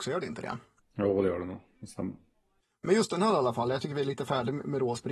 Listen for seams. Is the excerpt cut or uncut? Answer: uncut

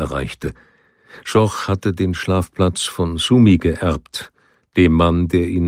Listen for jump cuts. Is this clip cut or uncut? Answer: uncut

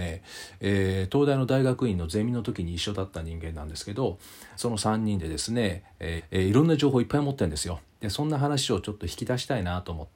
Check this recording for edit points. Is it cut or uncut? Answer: cut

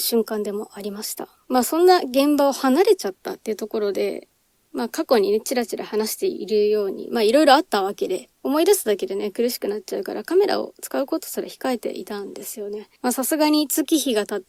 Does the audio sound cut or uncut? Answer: uncut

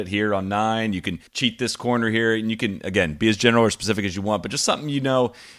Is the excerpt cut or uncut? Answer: cut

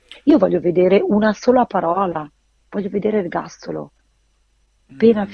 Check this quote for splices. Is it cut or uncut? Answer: uncut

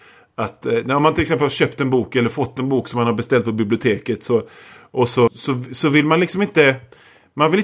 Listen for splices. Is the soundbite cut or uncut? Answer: cut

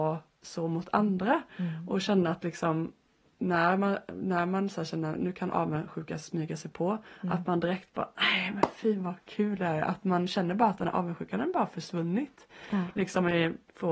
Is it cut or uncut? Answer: uncut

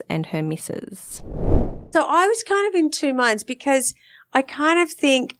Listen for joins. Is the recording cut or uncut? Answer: cut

